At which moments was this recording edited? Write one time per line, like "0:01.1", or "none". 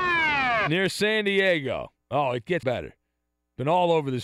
0:02.6